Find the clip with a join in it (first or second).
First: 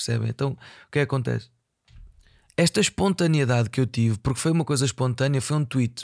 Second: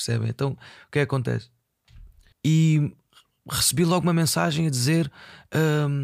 second